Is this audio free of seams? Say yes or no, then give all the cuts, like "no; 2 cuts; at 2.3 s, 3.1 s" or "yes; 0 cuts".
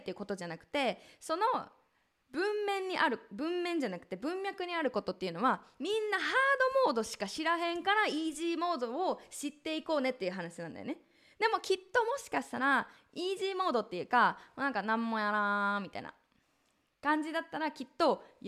yes; 0 cuts